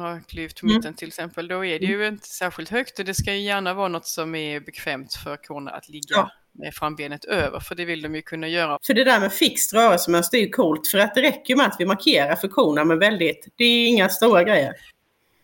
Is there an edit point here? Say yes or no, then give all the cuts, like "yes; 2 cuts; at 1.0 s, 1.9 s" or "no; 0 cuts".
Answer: yes; 2 cuts; at 8.8 s, 13.5 s